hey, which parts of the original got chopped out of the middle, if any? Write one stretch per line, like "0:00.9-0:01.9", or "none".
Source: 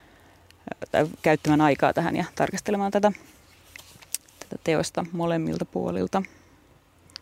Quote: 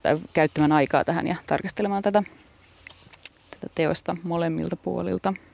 none